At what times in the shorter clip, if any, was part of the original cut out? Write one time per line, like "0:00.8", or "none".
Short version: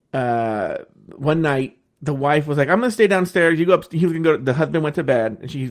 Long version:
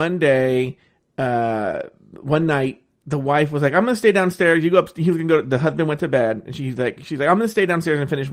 none